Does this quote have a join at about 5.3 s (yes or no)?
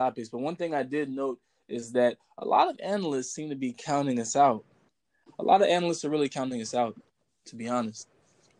yes